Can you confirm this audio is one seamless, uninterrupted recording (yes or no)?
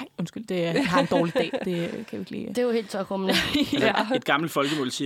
yes